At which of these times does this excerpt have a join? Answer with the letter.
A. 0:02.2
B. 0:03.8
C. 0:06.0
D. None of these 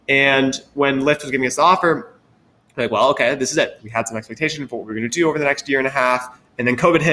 B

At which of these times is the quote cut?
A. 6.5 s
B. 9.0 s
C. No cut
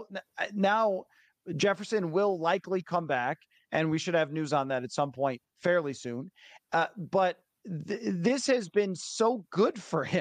C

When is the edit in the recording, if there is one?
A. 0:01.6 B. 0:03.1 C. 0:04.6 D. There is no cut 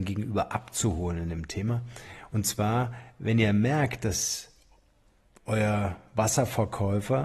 D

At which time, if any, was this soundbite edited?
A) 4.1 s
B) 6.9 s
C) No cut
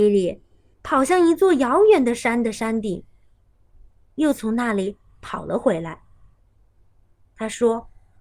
C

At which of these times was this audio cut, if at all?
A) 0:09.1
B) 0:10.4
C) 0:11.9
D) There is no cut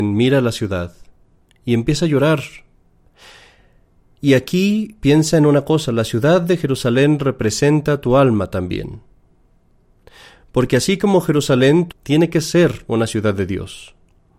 C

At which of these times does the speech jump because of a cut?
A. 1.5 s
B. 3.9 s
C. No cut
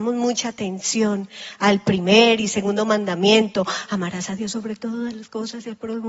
C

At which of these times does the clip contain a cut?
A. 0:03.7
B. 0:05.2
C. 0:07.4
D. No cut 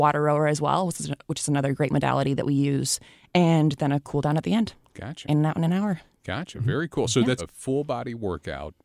C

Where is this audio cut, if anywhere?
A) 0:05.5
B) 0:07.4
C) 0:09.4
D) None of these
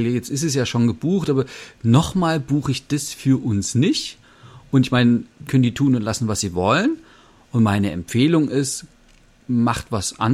A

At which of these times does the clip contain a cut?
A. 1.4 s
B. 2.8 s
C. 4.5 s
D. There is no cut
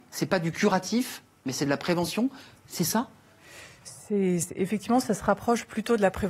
D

